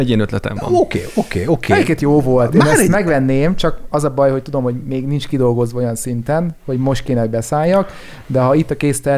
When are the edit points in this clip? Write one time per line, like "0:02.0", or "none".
none